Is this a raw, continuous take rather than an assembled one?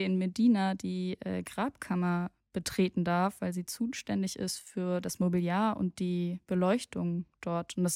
yes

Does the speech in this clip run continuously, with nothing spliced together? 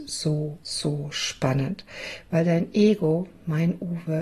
yes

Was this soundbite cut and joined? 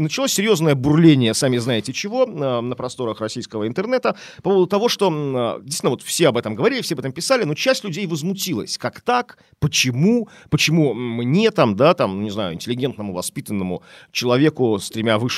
no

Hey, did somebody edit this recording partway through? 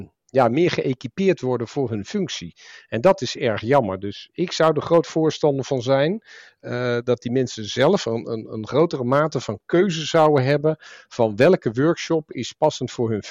no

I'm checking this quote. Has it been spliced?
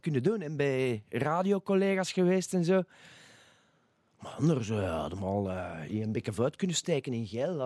no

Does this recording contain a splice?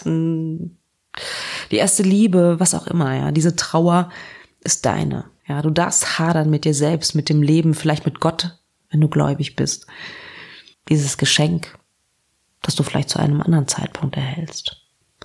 yes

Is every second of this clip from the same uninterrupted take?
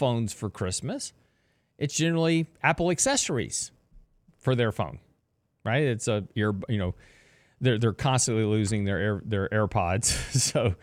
yes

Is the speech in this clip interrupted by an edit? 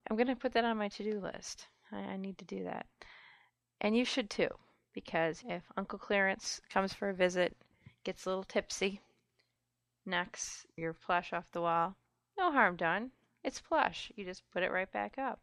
no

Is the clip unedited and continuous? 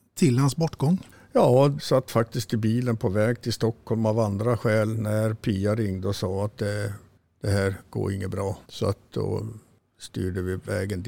no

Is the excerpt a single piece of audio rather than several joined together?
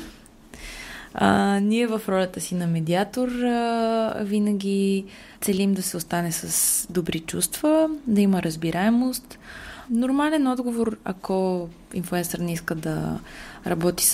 no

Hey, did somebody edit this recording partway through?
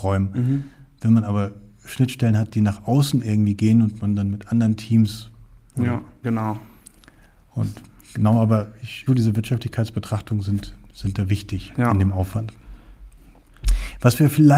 yes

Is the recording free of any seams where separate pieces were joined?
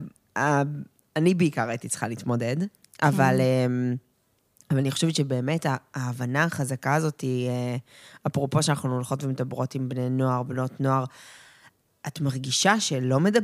yes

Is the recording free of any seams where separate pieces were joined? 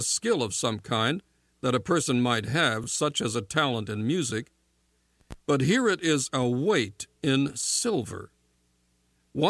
yes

